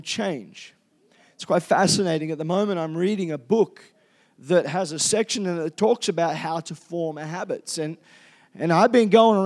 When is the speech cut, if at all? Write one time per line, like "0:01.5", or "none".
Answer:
none